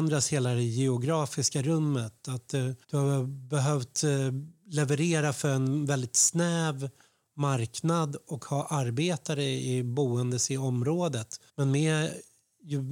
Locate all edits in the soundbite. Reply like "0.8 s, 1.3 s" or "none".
2.8 s, 11.5 s